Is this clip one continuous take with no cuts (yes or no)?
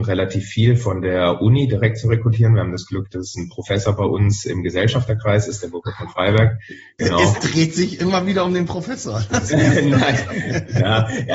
yes